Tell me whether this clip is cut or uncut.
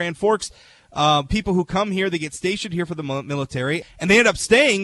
cut